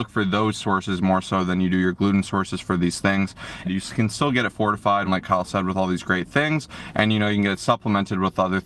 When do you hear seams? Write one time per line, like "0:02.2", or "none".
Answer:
0:03.6
0:05.1